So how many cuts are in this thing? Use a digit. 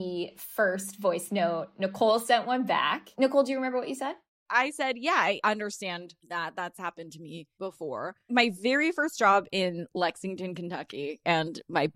0